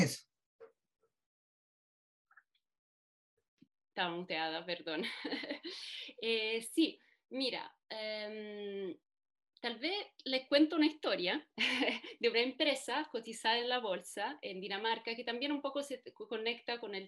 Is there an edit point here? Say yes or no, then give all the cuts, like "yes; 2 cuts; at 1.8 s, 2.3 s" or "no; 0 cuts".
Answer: no; 0 cuts